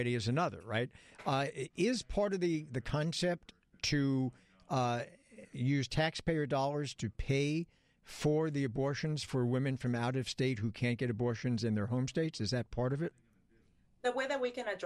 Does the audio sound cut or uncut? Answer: uncut